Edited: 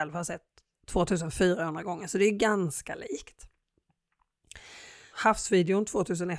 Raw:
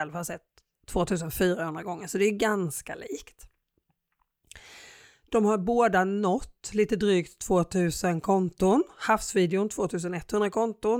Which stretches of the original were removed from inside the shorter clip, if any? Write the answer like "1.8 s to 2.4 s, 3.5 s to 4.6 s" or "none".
5.1 s to 8.9 s